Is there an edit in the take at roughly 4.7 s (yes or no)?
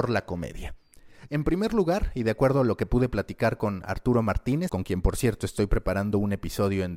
yes